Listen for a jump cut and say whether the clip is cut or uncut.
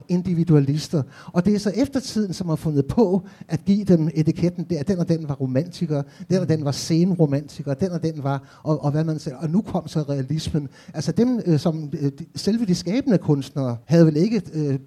cut